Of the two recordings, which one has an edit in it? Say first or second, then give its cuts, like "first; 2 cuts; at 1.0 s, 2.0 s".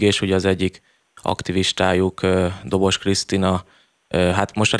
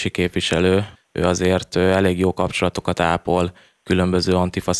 second; 1 cut; at 1.0 s